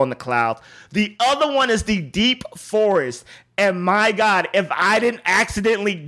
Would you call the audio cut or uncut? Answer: uncut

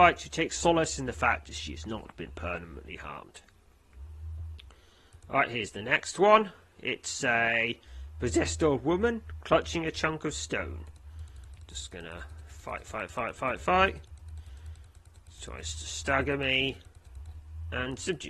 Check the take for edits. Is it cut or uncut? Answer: uncut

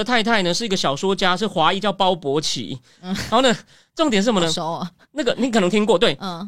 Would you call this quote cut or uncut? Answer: uncut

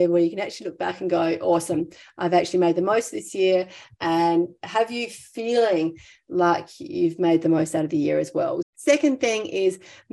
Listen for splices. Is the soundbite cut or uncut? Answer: cut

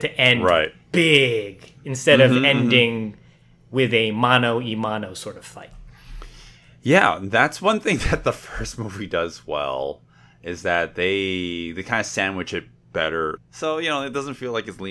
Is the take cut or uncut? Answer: cut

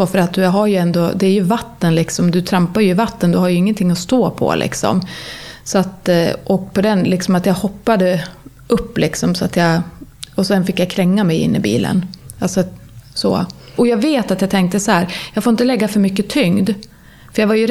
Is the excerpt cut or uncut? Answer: uncut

